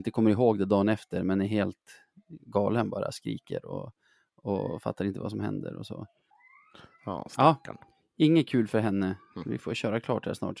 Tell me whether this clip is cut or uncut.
uncut